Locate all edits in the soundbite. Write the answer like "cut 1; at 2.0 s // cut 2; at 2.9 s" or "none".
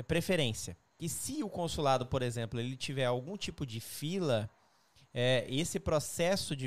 cut 1; at 0.9 s